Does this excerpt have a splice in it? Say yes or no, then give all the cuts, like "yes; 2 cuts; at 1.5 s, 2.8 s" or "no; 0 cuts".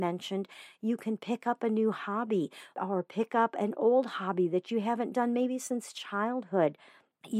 yes; 1 cut; at 2.7 s